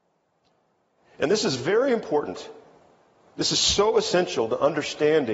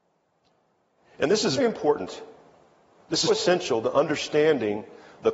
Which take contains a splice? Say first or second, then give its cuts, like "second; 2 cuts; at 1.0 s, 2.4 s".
second; 2 cuts; at 1.6 s, 3.3 s